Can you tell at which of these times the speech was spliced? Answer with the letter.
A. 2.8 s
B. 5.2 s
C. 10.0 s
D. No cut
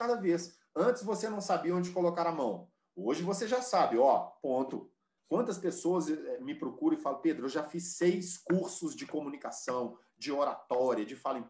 B